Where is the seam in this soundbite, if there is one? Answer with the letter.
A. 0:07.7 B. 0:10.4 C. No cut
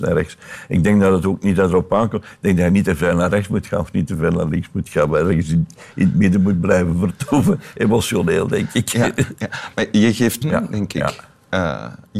B